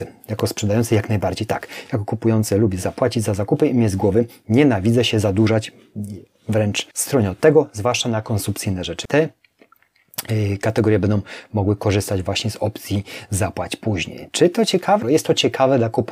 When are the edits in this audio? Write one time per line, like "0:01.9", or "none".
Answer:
0:06.9
0:09.1
0:15.0